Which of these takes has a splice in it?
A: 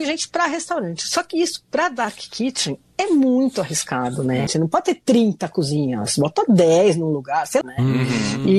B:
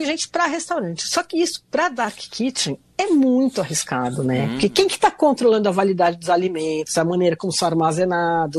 A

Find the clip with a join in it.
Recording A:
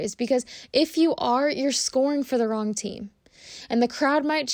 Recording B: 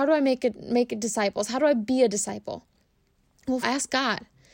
B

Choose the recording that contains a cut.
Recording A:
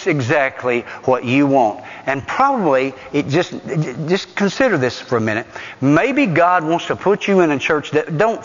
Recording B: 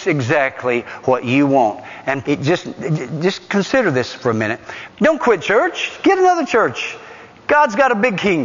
B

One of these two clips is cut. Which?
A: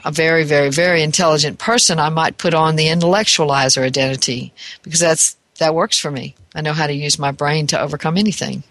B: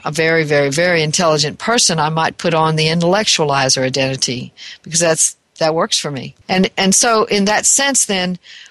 B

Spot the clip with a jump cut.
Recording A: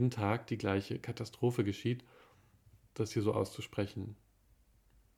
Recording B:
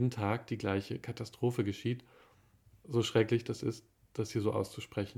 A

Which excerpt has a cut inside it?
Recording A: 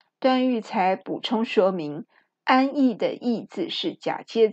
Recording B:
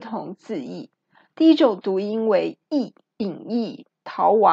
B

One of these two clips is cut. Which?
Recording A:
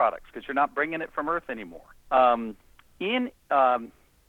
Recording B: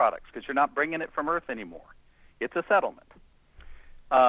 A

